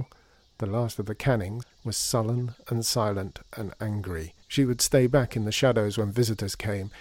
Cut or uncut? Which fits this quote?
cut